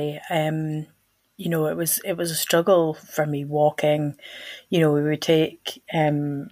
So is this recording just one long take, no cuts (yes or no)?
yes